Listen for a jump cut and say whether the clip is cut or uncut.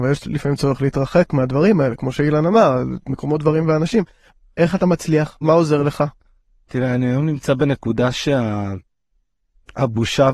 cut